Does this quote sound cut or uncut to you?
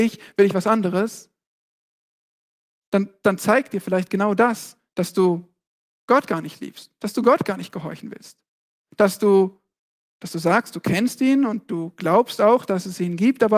uncut